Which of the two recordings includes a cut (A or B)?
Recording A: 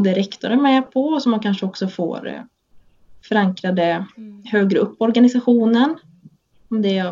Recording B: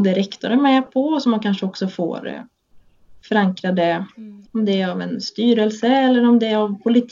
B